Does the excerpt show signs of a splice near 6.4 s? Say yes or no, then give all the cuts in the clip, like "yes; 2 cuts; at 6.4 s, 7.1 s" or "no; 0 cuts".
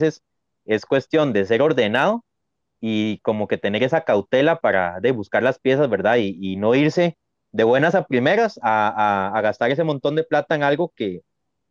no; 0 cuts